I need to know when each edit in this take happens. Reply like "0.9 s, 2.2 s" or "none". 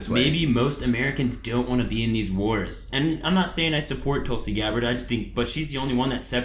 none